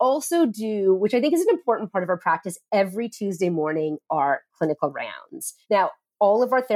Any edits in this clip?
no; 0 cuts

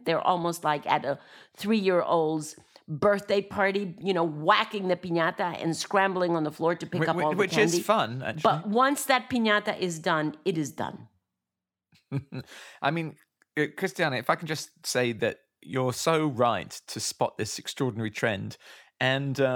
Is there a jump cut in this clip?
no; 0 cuts

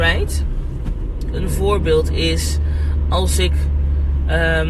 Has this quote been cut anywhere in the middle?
yes; 1 cut; at 1.3 s

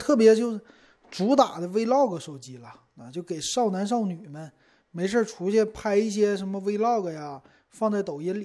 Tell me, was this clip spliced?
no; 0 cuts

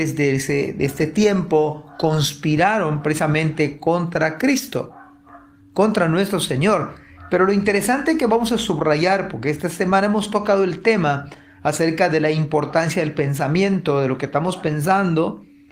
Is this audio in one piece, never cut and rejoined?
yes; 0 cuts

